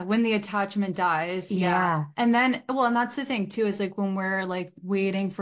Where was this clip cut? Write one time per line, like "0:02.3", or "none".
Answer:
none

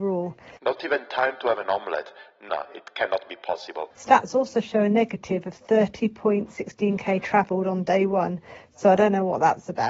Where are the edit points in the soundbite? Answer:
0:02.5
0:03.9

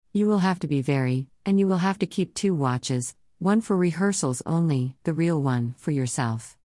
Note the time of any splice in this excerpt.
0:01.3
0:05.0

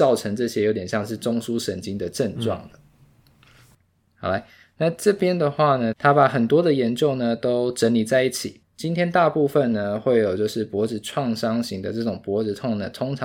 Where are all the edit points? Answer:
0:04.1
0:05.9
0:08.6

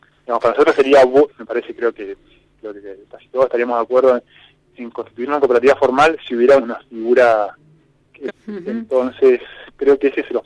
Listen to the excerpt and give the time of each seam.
0:01.3
0:06.6
0:08.3

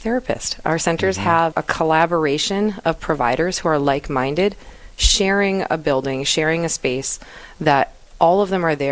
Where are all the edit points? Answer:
0:01.5

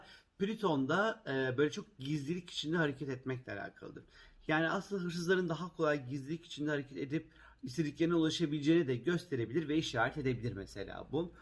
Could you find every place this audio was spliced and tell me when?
none

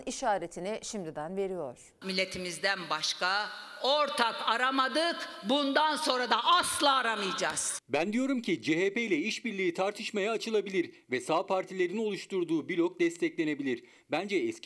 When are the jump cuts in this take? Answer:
0:02.0

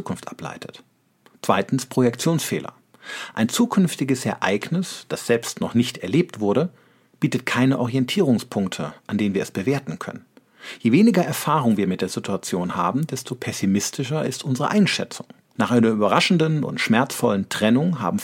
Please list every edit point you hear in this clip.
0:15.6

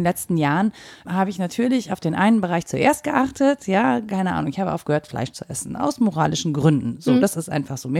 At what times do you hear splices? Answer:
0:01.0

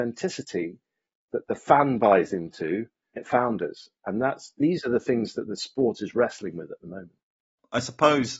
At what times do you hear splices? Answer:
0:03.2

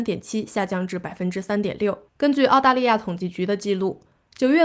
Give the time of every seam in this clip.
0:02.1

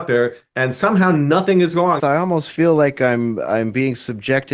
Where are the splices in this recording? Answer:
0:02.0

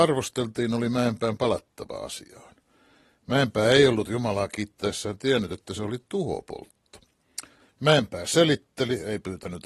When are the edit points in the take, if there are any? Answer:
0:07.6

